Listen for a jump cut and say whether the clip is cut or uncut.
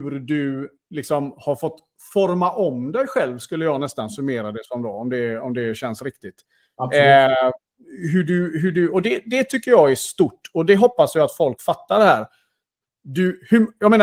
uncut